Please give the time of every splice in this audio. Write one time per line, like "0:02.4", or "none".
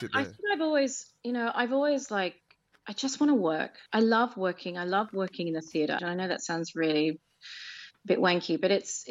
0:03.9
0:06.0